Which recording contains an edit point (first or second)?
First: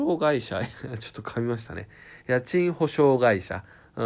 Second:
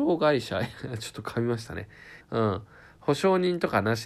second